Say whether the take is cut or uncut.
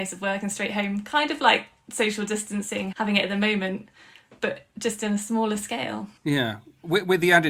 cut